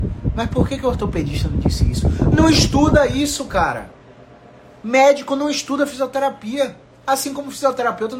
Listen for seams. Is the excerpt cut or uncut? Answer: uncut